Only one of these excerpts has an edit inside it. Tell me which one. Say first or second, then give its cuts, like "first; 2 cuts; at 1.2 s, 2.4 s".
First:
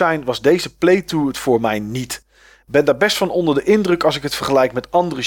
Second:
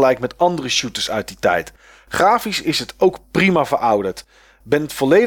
first; 1 cut; at 2.6 s